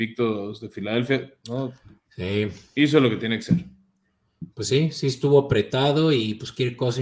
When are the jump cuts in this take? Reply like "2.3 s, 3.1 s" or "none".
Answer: 1.4 s